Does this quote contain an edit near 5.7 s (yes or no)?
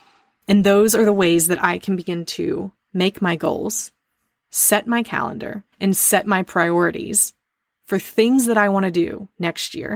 yes